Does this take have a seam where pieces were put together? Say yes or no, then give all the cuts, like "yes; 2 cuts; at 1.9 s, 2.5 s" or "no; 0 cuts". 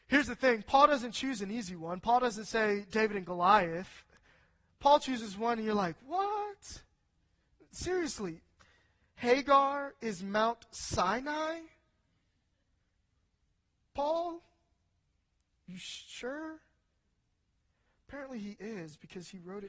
no; 0 cuts